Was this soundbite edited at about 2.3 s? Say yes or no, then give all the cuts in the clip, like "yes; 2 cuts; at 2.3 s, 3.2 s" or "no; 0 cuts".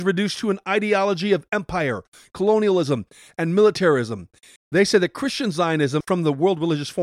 no; 2 cuts; at 4.6 s, 6.0 s